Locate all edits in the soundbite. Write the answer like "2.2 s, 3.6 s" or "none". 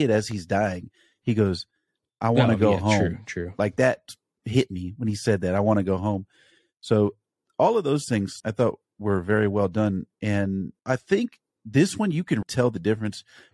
8.4 s, 10.8 s, 12.4 s